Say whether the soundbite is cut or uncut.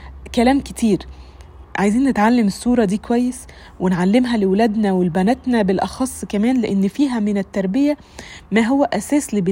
cut